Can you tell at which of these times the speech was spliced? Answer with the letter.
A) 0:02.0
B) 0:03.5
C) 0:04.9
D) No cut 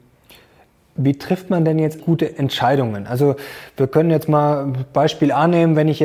A